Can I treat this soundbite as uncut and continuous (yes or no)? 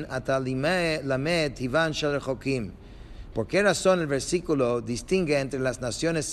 no